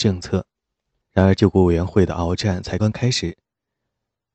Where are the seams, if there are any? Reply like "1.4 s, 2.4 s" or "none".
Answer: 1.0 s, 2.8 s